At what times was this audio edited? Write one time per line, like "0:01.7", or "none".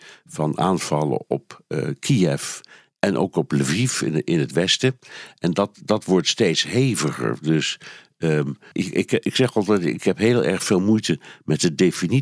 0:08.7